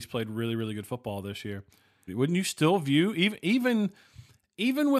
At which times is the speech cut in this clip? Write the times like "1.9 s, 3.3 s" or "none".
2.1 s